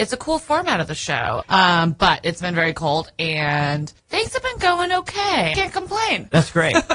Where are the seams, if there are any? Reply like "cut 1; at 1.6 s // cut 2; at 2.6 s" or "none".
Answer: cut 1; at 1.4 s // cut 2; at 4.0 s // cut 3; at 5.5 s

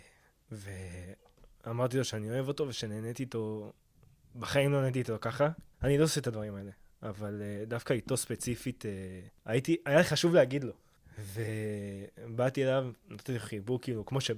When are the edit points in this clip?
cut 1; at 5.7 s

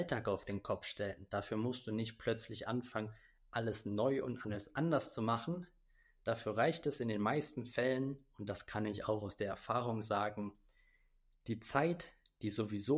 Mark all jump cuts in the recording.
none

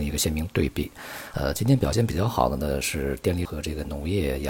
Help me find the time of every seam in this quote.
cut 1; at 1.3 s // cut 2; at 3.4 s

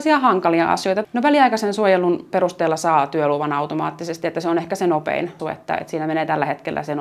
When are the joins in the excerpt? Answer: cut 1; at 1.0 s // cut 2; at 5.4 s

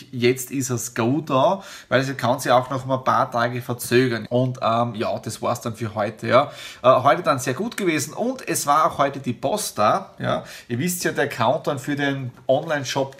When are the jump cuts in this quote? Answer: cut 1; at 4.2 s

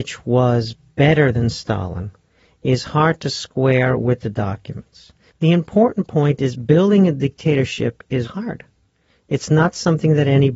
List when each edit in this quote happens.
cut 1; at 5.3 s // cut 2; at 8.2 s

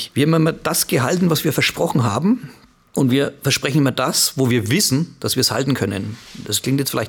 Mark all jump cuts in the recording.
none

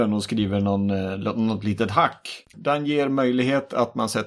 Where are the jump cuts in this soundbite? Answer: cut 1; at 2.5 s

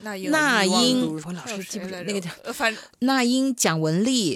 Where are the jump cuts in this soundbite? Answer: cut 1; at 1.2 s // cut 2; at 2.9 s

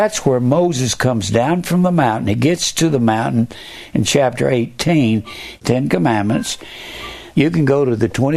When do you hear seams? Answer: cut 1; at 5.6 s // cut 2; at 7.3 s

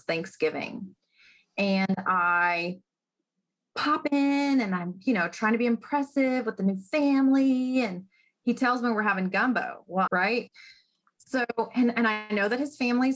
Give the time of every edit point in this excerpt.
cut 1; at 10.1 s

